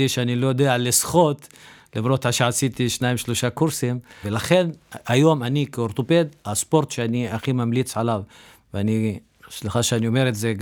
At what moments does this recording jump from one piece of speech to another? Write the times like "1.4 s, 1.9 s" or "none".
4.2 s